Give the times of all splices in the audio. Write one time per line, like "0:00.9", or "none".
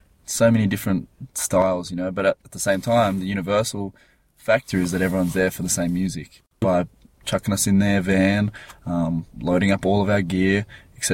0:06.6